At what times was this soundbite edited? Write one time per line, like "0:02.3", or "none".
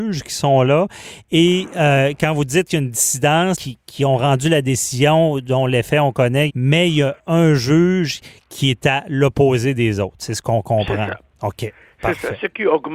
0:03.5
0:06.5